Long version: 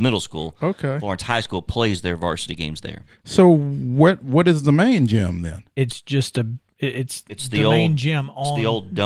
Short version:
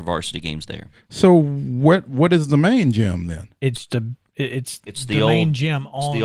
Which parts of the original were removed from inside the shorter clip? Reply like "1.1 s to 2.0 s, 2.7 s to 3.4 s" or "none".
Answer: 6.0 s to 6.3 s